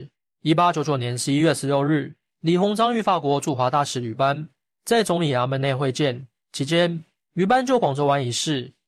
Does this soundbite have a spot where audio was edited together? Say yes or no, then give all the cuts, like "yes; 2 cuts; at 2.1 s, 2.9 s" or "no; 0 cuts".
no; 0 cuts